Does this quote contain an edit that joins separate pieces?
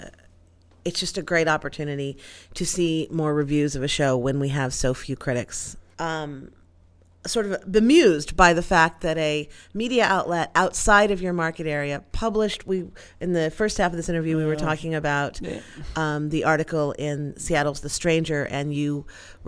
yes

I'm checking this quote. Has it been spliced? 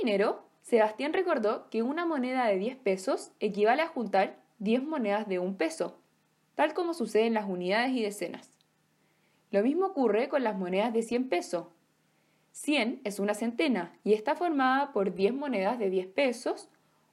yes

